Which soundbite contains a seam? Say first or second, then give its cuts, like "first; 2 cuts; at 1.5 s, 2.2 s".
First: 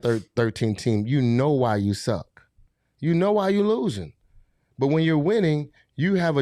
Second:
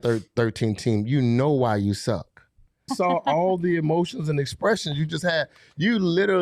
second; 1 cut; at 2.9 s